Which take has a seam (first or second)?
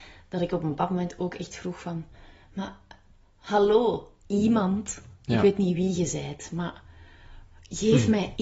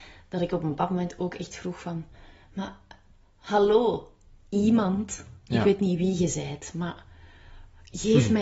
first